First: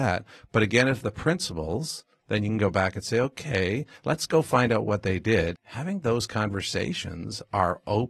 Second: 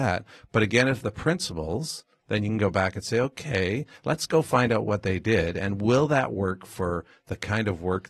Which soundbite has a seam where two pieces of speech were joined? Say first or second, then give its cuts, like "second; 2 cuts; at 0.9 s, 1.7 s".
first; 1 cut; at 5.5 s